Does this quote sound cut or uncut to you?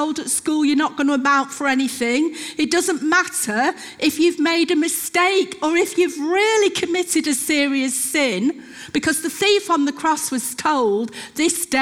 uncut